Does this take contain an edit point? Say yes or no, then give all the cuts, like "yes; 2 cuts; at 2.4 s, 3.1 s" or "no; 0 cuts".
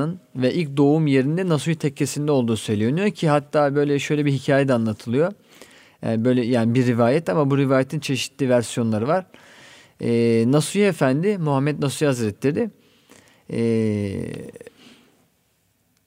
no; 0 cuts